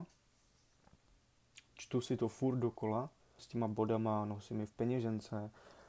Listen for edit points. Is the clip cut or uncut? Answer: cut